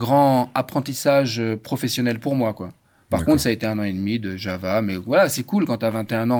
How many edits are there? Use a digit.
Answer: 0